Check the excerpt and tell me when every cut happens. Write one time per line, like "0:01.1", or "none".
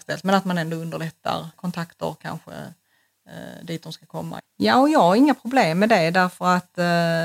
0:01.5
0:04.4